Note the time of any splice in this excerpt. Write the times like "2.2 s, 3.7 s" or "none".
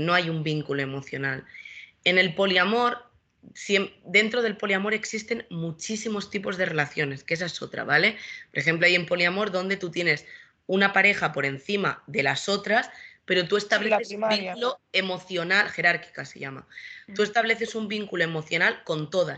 none